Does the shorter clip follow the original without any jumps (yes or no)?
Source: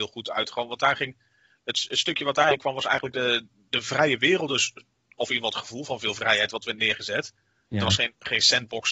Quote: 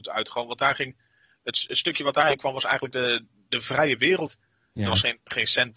no